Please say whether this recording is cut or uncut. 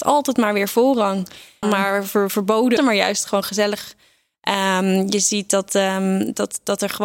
cut